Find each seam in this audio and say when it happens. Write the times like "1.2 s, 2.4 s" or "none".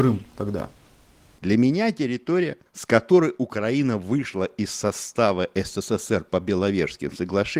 1.4 s, 2.7 s